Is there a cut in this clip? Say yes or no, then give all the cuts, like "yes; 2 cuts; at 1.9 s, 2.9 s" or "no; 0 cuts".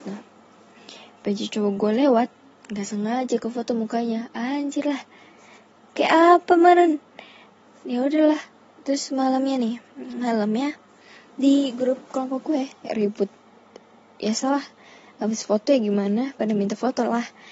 no; 0 cuts